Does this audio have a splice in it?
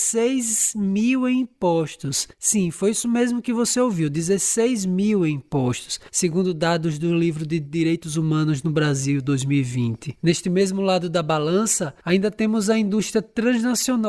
no; 0 cuts

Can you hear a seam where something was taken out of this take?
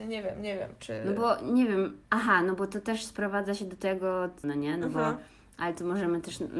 yes; 2 cuts; at 2.0 s, 4.4 s

